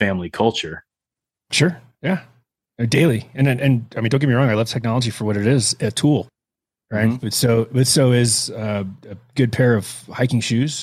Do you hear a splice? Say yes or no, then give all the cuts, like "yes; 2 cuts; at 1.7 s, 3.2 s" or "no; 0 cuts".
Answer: no; 0 cuts